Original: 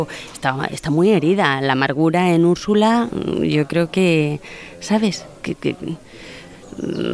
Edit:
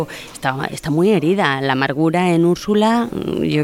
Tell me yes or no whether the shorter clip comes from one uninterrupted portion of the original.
yes